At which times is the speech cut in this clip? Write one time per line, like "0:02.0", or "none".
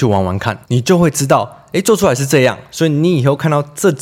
none